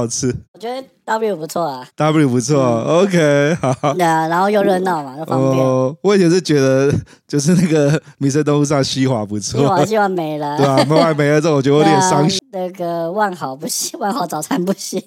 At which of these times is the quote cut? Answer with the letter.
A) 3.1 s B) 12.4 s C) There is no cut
B